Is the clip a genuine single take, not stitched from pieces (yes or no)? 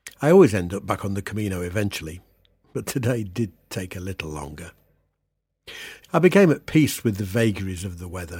no